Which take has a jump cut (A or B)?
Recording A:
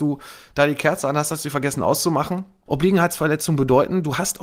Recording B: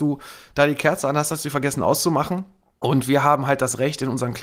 A